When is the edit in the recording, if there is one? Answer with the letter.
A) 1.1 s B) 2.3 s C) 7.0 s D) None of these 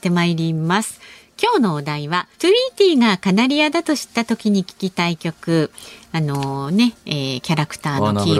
B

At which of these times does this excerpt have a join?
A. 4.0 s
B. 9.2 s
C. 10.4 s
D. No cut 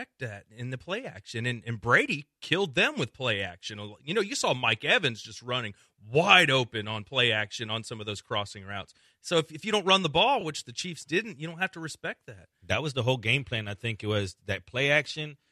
D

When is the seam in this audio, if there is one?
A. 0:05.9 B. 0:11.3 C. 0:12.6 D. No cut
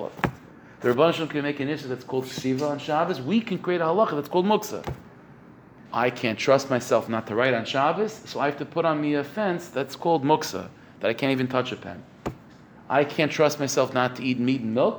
A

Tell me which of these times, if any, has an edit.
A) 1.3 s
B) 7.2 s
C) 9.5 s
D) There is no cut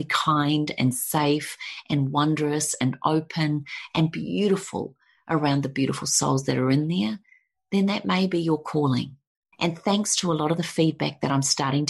C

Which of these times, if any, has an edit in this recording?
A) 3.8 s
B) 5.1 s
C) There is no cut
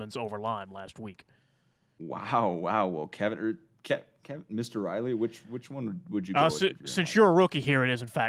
C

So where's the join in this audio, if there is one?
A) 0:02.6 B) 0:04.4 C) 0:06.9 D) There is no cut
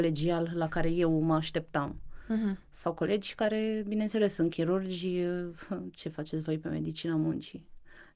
D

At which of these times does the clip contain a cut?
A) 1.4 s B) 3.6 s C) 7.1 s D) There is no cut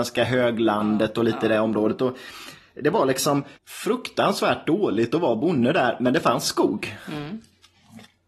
B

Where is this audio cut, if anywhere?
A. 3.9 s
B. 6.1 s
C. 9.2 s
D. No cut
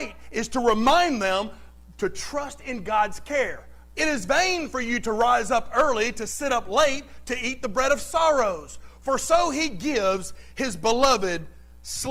A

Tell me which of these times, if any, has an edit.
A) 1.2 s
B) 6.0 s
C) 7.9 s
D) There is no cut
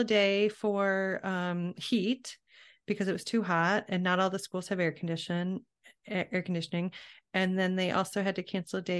D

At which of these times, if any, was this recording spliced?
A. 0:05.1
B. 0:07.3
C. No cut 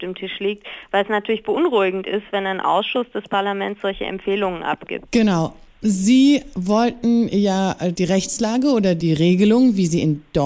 C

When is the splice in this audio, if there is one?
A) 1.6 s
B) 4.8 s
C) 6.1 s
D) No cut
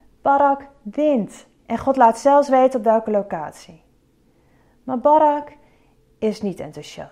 A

